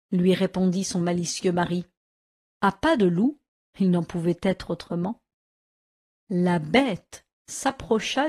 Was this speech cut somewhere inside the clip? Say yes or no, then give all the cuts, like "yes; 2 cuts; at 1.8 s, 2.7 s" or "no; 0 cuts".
yes; 1 cut; at 2.4 s